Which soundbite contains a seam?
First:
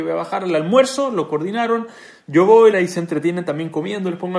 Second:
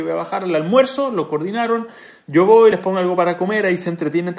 first; 1 cut; at 2.7 s

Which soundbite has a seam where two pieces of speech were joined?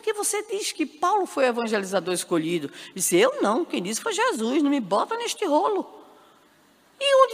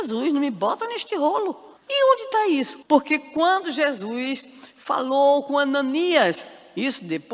second; 2 cuts; at 1.8 s, 2.8 s

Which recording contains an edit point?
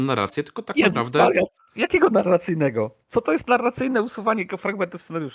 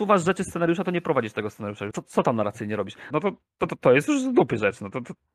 second; 2 cuts; at 1.9 s, 3.1 s

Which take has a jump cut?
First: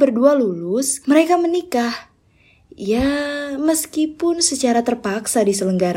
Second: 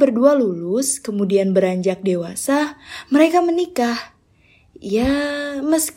first; 1 cut; at 1.0 s

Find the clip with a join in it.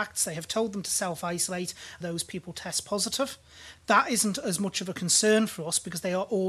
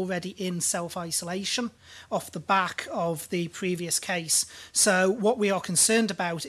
first; 1 cut; at 2.0 s

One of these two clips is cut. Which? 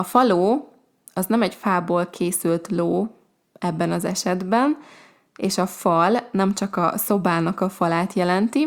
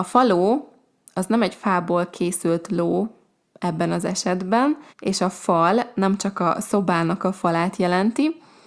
second; 1 cut; at 4.9 s

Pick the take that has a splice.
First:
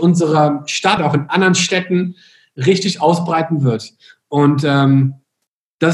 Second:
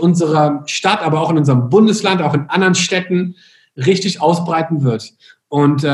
first; 1 cut; at 1.0 s

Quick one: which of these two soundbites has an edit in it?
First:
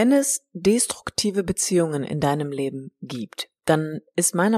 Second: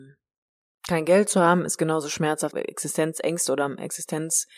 second; 1 cut; at 2.5 s

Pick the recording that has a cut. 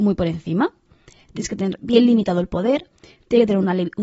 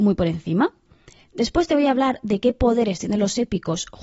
first; 1 cut; at 1.3 s

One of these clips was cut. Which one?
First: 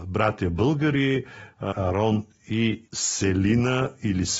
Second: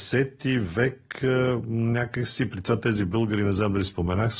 first; 2 cuts; at 1.7 s, 2.9 s

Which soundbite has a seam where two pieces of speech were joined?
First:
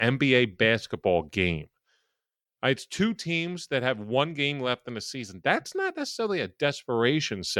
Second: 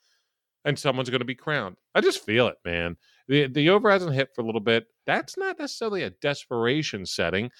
second; 2 cuts; at 1.8 s, 5.0 s

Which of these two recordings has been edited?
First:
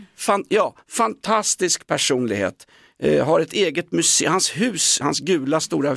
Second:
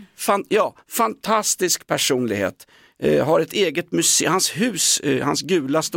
first; 1 cut; at 5.0 s

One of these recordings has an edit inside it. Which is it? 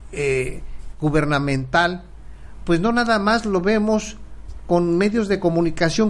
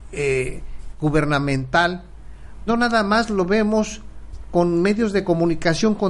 second; 1 cut; at 2.7 s

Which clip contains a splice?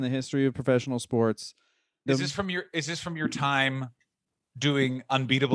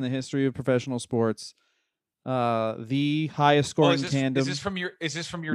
first; 1 cut; at 2.1 s

